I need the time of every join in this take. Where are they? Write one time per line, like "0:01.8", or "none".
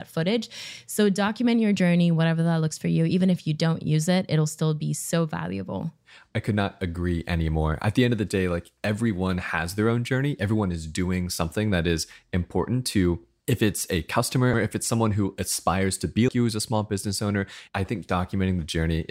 0:14.5
0:16.3